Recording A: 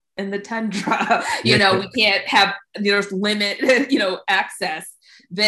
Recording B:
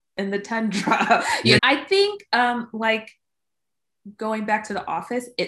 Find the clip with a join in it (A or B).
B